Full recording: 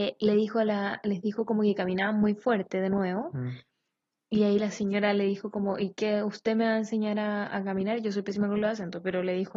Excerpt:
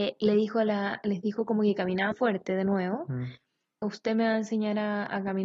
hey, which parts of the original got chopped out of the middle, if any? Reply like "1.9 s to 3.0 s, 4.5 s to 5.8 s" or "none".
2.1 s to 2.4 s, 4.1 s to 6.2 s